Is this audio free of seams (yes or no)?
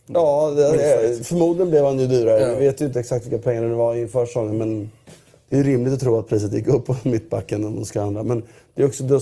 yes